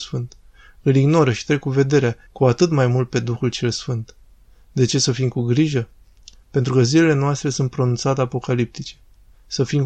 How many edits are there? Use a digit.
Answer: 1